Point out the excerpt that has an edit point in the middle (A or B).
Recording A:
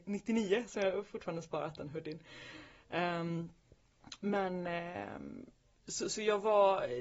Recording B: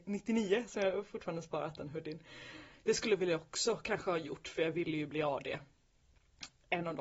B